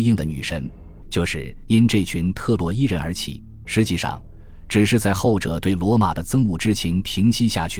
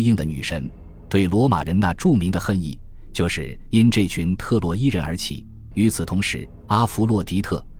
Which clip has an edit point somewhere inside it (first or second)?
first